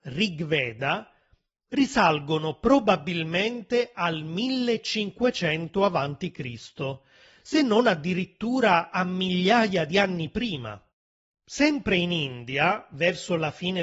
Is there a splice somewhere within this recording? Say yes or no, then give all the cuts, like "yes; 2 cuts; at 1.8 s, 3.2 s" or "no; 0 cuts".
yes; 1 cut; at 11.3 s